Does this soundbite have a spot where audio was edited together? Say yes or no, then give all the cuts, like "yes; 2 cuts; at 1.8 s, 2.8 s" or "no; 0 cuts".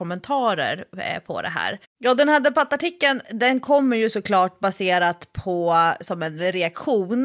yes; 1 cut; at 1.8 s